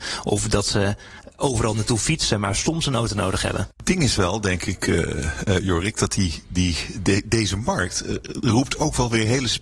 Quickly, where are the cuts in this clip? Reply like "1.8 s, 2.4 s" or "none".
none